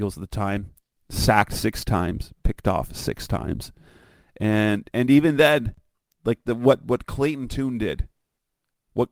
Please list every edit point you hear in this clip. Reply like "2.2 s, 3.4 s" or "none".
none